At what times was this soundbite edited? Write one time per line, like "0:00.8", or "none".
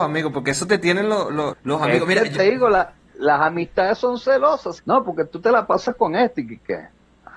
0:01.5
0:04.8